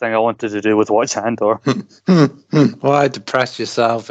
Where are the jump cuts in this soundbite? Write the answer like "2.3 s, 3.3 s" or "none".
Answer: none